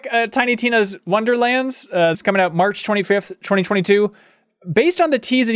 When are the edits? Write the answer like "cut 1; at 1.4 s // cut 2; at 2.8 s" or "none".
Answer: cut 1; at 2.1 s